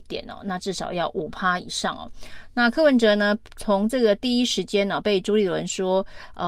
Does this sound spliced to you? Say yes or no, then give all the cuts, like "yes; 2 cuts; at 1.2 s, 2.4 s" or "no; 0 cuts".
no; 0 cuts